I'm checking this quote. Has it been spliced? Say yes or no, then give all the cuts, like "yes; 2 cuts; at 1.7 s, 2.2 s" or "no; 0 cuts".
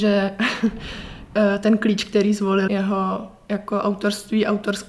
yes; 1 cut; at 2.7 s